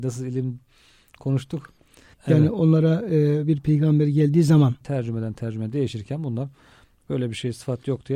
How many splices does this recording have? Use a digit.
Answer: 2